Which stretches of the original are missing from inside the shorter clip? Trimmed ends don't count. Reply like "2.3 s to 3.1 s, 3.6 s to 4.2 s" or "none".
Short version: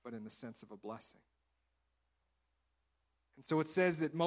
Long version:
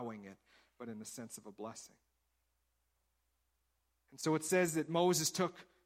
none